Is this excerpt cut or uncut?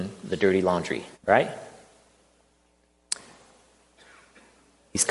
cut